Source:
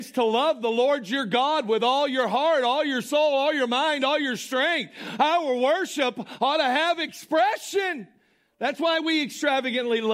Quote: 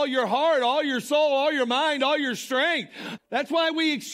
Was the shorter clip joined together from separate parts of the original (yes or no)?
yes